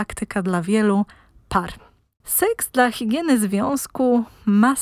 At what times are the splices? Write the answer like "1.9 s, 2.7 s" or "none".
2.2 s